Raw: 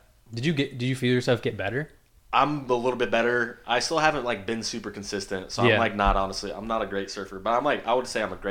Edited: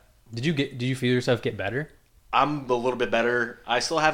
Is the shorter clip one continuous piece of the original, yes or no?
yes